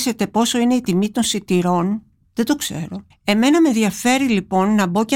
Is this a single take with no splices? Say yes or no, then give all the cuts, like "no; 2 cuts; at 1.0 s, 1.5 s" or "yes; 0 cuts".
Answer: no; 1 cut; at 3.1 s